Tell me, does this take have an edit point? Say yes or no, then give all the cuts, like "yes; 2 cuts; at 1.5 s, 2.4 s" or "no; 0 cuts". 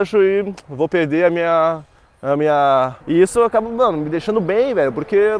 yes; 1 cut; at 3.0 s